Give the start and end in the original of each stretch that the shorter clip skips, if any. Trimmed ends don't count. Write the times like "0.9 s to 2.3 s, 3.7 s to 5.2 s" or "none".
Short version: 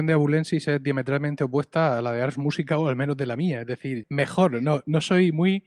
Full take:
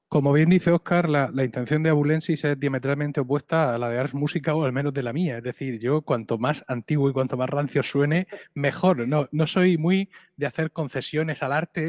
5.8 s to 8.5 s